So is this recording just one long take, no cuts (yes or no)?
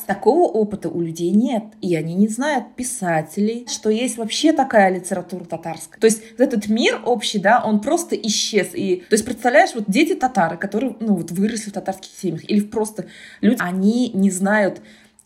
no